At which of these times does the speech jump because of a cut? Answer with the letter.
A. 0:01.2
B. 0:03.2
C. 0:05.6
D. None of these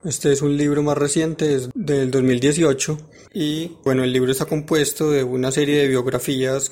B